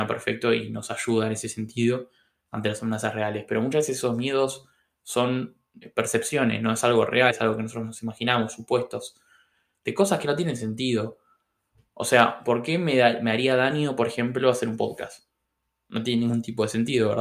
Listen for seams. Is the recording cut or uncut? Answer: cut